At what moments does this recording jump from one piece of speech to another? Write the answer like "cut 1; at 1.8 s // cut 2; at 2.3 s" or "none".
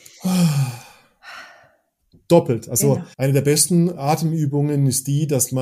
cut 1; at 3.1 s